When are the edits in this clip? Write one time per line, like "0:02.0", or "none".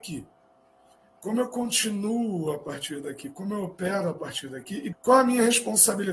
0:04.9